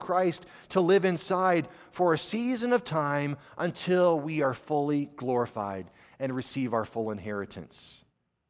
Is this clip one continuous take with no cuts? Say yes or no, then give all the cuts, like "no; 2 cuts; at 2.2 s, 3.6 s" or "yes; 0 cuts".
yes; 0 cuts